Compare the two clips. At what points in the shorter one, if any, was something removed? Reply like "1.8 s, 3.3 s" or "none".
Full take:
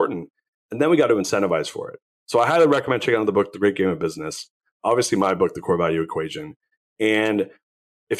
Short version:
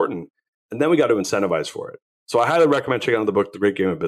none